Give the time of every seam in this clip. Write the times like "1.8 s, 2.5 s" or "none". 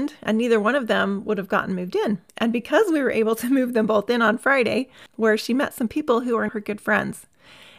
2.3 s, 5.1 s, 6.5 s